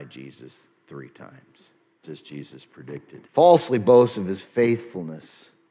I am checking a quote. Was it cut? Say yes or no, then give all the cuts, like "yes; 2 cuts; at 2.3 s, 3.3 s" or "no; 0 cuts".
yes; 2 cuts; at 2.0 s, 3.3 s